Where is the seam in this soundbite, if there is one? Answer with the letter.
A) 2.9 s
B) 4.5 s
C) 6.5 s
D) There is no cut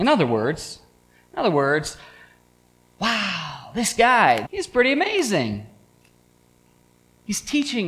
B